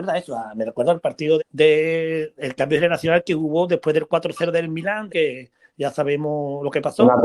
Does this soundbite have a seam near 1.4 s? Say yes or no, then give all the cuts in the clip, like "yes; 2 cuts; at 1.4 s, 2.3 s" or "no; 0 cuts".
yes; 2 cuts; at 1.4 s, 5.1 s